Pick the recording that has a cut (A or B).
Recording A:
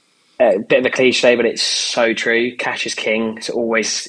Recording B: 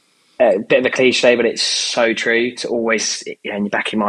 B